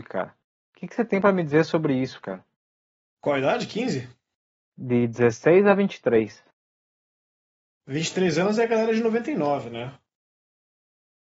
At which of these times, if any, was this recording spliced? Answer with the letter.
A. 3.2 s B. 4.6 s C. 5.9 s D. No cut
D